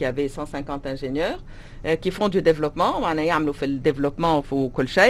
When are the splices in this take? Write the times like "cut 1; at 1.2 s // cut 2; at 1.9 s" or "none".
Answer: none